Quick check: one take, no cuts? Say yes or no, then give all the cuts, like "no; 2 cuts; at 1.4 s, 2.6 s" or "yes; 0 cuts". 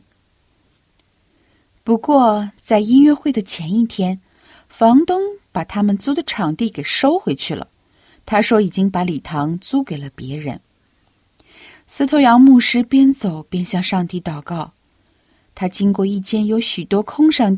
yes; 0 cuts